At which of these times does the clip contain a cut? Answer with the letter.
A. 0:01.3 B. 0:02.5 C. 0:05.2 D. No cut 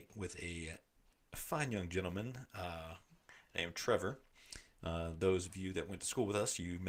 D